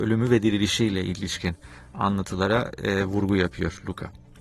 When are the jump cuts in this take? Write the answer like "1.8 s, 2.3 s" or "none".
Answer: none